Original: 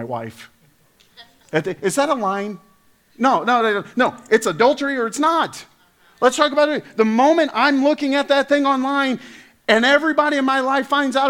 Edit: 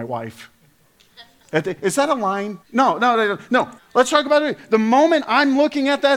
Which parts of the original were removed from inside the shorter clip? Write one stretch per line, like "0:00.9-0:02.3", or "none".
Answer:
0:02.6-0:03.1
0:04.2-0:06.0